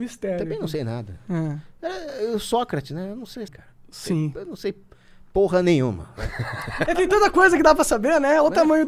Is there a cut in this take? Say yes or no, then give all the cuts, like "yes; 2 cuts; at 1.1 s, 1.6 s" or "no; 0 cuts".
yes; 2 cuts; at 3.5 s, 6.9 s